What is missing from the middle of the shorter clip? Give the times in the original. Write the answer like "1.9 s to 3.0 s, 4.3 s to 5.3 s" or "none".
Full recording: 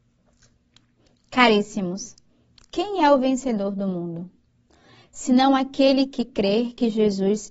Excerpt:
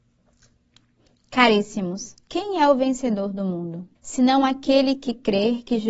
2.2 s to 2.7 s, 4.4 s to 5.1 s